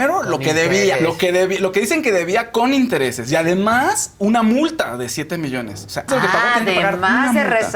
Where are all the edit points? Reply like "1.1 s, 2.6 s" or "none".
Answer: 1.0 s, 6.1 s

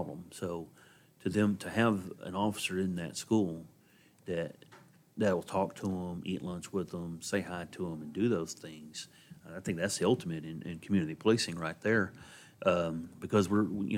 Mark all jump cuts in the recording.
none

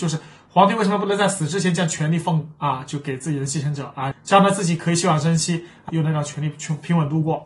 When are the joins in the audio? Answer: 4.1 s, 5.9 s

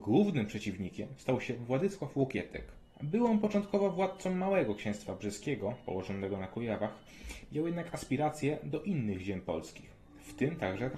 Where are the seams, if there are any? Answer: 2.9 s

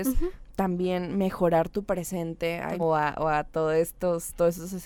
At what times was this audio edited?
2.8 s

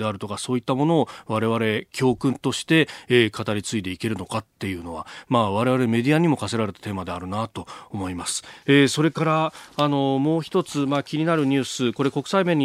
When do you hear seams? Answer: 8.6 s

